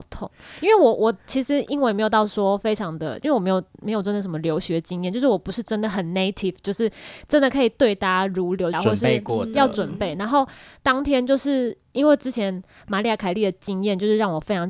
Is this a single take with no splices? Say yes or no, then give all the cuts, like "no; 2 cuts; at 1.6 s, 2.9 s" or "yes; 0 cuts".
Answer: no; 1 cut; at 8.7 s